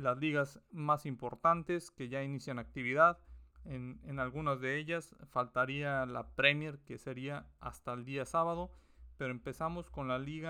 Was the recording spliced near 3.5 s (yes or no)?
yes